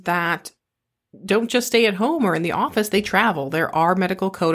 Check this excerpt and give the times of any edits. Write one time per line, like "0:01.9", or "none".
none